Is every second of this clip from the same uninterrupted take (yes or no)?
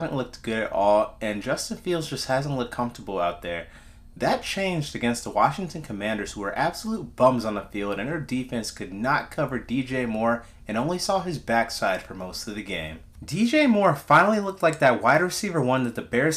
no